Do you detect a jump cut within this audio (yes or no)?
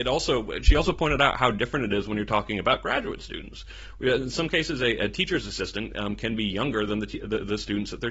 no